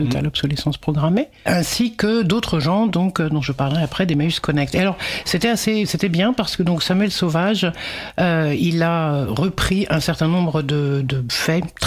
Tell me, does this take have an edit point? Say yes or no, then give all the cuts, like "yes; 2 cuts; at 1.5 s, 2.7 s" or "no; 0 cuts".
no; 0 cuts